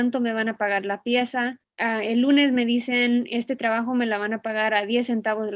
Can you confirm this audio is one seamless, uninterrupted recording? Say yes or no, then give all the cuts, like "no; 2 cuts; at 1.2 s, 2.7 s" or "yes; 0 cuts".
yes; 0 cuts